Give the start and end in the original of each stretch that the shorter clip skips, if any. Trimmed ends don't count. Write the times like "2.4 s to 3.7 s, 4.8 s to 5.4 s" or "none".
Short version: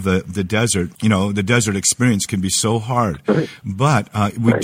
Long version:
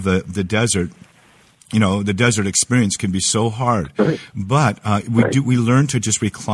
1.0 s to 1.7 s